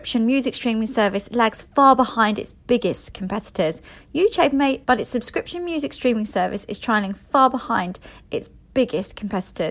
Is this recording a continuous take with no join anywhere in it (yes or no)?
no